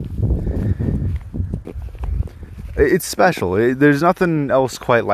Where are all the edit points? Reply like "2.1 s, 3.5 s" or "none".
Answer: 1.6 s